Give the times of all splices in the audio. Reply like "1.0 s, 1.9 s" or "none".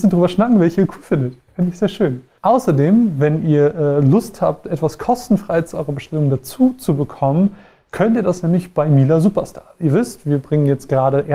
none